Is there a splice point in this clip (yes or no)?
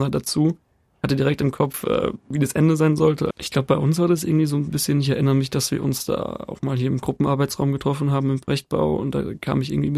yes